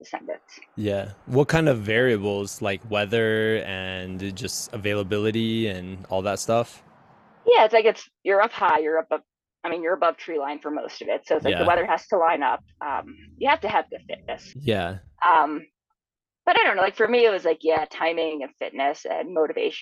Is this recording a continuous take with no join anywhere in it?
no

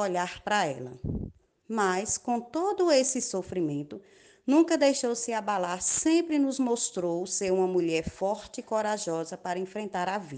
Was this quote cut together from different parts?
yes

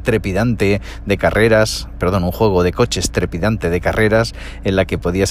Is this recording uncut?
yes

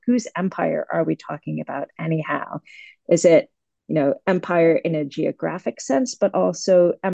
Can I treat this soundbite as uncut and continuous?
yes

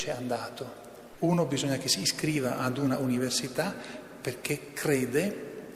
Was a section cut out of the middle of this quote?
yes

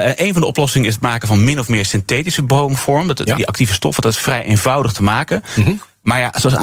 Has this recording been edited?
no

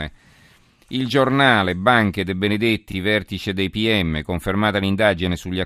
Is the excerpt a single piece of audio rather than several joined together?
yes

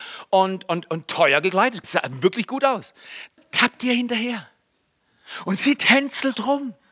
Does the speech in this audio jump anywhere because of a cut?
yes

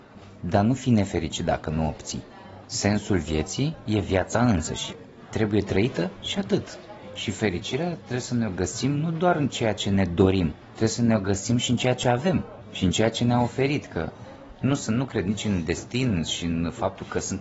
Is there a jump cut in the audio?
no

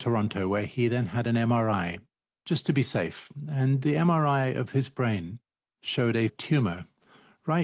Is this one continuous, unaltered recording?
yes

